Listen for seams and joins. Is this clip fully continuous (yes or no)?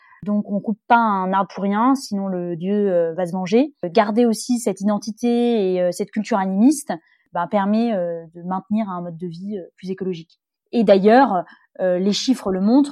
yes